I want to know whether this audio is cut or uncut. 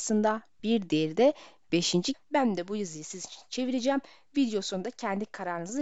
cut